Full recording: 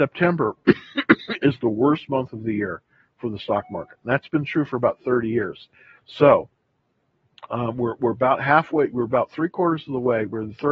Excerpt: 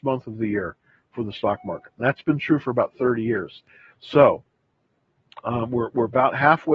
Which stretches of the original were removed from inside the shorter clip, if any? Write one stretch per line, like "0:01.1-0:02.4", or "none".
none